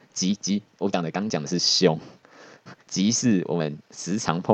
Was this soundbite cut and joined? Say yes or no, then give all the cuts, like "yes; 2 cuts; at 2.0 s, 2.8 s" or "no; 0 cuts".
no; 0 cuts